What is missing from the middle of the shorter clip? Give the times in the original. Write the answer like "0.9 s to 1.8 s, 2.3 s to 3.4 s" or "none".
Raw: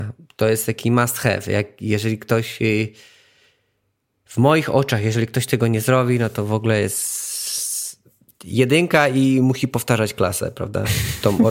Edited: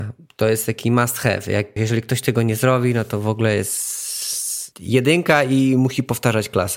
1.8 s to 5.0 s, 8.0 s to 8.4 s